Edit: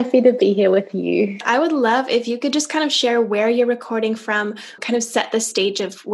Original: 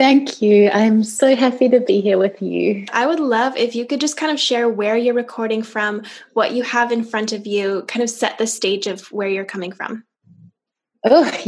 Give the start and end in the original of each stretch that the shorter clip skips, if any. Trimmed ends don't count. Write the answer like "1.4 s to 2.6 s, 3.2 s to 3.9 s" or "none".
6.3 s to 7.8 s